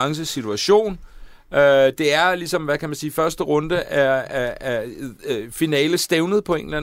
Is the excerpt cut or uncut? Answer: uncut